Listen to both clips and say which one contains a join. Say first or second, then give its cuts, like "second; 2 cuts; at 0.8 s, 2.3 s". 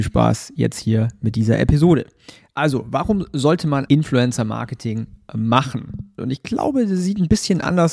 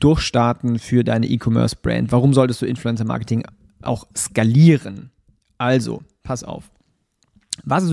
first; 2 cuts; at 3.9 s, 6.2 s